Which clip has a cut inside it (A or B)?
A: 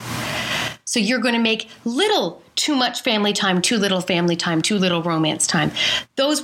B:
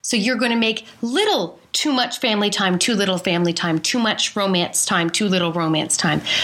A